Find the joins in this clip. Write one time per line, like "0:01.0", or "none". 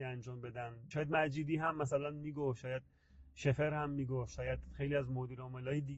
0:00.9